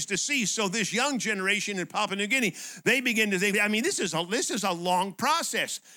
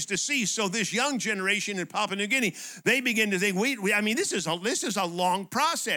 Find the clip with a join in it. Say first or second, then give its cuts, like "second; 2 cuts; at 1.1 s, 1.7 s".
first; 1 cut; at 3.5 s